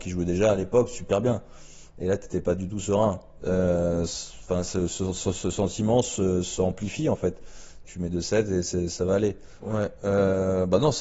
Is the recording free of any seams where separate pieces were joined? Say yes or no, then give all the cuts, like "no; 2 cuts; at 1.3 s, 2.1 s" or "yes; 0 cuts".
no; 3 cuts; at 3.4 s, 7.8 s, 9.6 s